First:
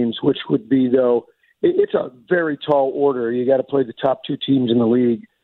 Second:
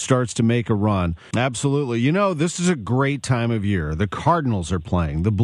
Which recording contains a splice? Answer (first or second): second